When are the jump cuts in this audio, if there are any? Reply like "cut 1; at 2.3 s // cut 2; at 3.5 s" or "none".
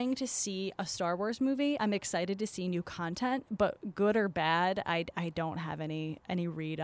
none

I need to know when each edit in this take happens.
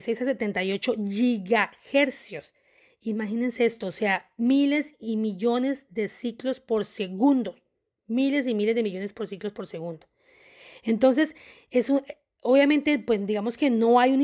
none

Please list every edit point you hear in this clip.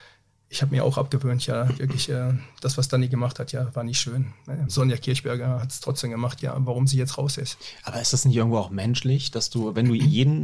cut 1; at 4.7 s // cut 2; at 6.4 s

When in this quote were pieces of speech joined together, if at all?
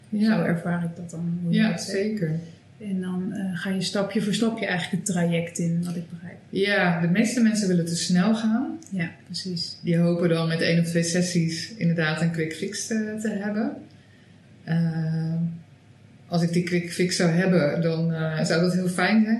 none

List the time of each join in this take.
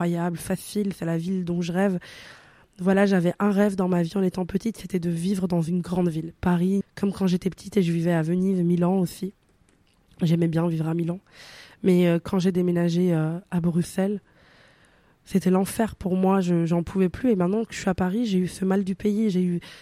cut 1; at 6.8 s

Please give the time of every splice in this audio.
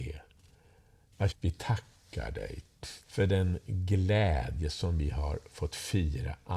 cut 1; at 1.3 s // cut 2; at 3.0 s

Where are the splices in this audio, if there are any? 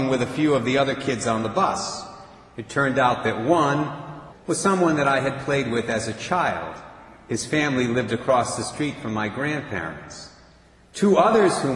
cut 1; at 4.3 s

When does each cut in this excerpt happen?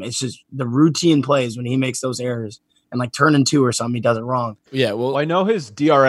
cut 1; at 4.7 s

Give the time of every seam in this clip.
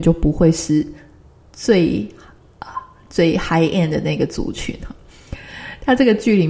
none

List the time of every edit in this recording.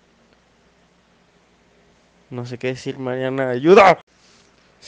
none

